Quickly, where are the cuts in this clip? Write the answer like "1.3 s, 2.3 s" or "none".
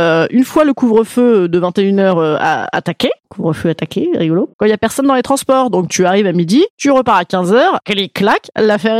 4.5 s